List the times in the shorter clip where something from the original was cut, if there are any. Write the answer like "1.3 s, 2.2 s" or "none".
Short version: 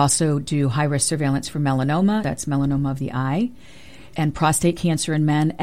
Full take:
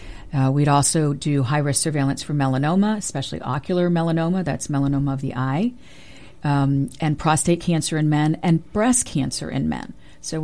2.2 s, 4.1 s